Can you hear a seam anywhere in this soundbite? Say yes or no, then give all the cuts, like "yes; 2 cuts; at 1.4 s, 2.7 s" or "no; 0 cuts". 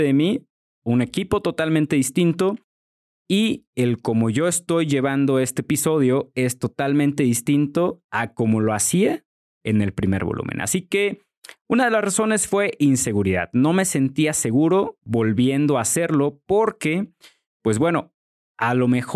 no; 0 cuts